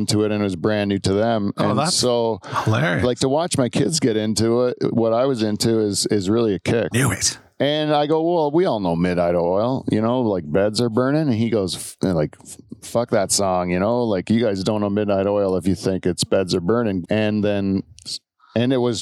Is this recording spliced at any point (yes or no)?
yes